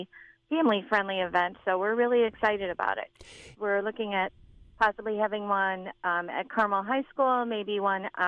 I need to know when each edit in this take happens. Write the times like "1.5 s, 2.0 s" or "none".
3.5 s